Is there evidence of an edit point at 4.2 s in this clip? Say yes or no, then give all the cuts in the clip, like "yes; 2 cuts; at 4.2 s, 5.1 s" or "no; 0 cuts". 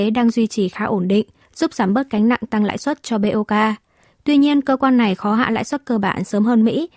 no; 1 cut; at 1.4 s